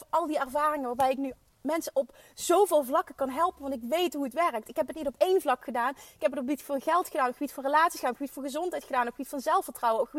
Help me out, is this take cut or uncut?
uncut